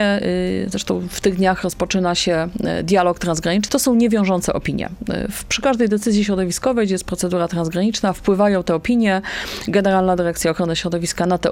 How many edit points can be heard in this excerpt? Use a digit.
1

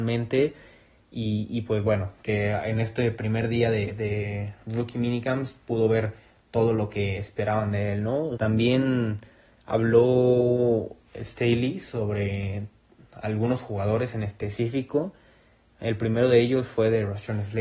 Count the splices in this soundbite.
1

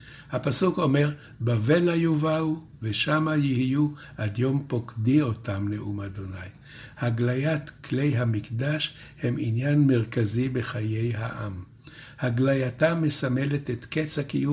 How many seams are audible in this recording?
1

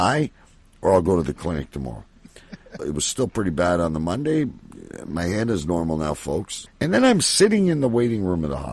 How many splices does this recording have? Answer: 2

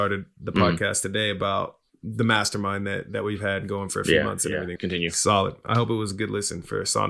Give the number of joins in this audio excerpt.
1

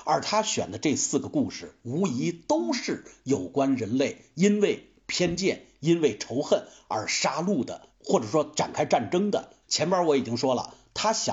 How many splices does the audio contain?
2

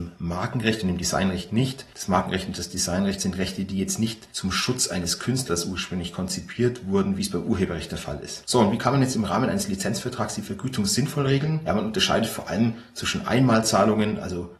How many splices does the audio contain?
0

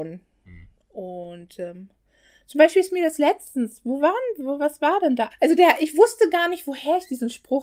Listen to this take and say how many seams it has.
1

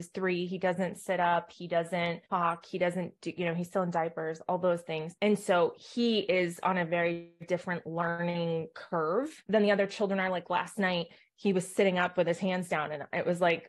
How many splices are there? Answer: 1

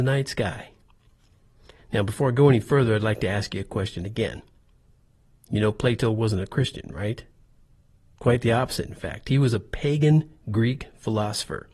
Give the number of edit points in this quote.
1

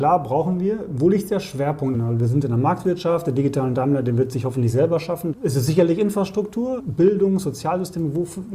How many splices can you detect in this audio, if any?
3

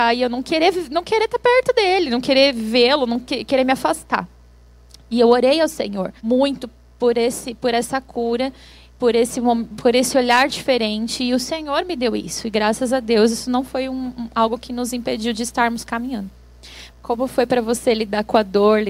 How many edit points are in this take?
2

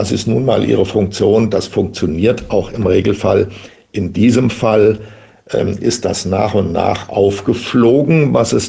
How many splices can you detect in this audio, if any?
0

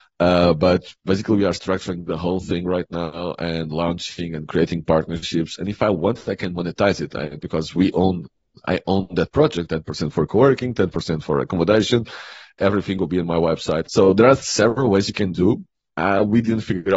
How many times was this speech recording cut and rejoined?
2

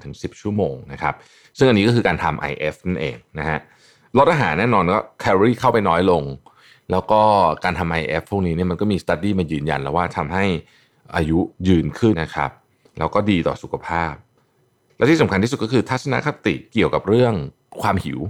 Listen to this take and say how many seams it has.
1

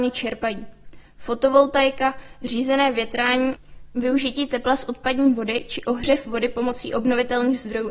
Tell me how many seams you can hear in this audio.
0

